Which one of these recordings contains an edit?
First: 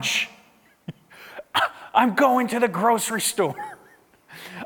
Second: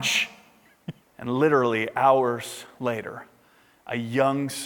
second; 1 cut; at 1.0 s

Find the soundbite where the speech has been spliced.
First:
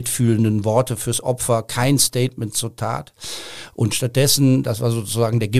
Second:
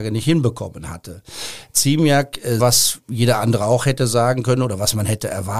second; 1 cut; at 2.6 s

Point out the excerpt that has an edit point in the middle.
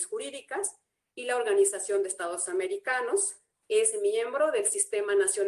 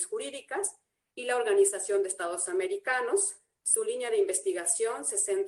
first; 1 cut; at 3.5 s

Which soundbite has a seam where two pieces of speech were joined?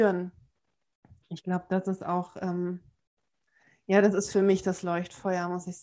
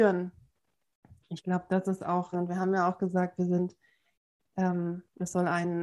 second; 1 cut; at 2.3 s

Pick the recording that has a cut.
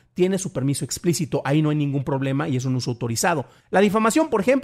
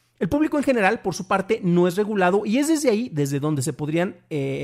first; 1 cut; at 3.6 s

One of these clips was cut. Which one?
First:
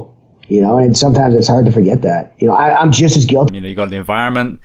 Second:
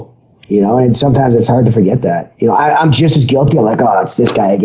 first; 1 cut; at 3.5 s

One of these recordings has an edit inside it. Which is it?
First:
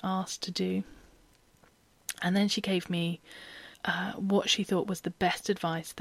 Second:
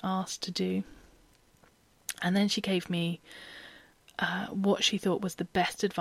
first; 1 cut; at 3.7 s

